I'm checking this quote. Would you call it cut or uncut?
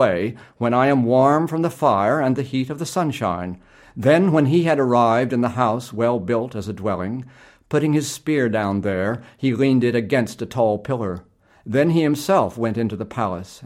cut